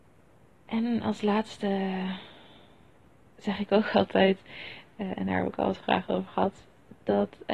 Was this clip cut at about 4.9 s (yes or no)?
no